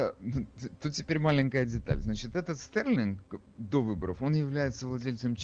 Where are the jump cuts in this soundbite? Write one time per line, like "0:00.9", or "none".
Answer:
none